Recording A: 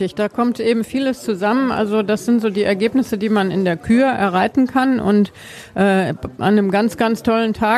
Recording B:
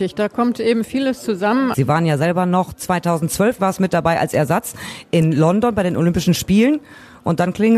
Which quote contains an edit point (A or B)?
B